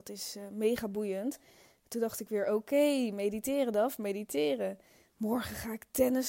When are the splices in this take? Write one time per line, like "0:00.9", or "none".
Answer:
0:05.1